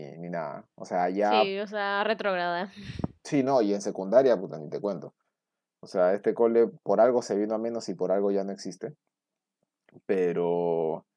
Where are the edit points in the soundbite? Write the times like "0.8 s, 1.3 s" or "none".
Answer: none